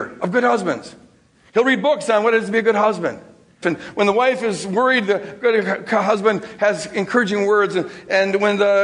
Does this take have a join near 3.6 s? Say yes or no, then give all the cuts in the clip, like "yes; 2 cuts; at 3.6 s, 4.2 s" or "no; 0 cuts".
yes; 1 cut; at 3.6 s